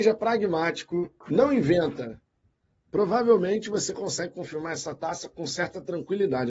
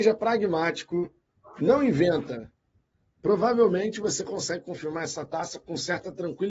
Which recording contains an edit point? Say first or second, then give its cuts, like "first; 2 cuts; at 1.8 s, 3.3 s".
first; 1 cut; at 1.2 s